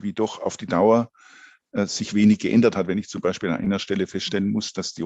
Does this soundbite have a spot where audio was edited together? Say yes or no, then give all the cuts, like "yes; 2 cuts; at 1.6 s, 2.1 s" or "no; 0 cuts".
no; 0 cuts